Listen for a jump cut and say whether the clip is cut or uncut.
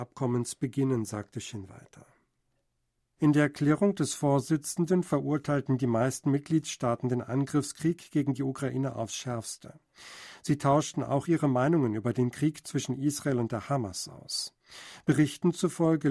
cut